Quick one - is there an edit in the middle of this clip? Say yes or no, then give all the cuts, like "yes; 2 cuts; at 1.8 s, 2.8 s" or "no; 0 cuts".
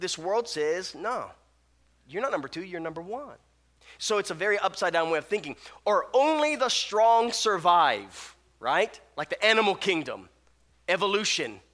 no; 0 cuts